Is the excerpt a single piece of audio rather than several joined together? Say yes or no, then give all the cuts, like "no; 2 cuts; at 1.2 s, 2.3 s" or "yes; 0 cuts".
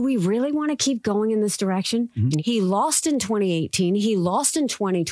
no; 1 cut; at 2.3 s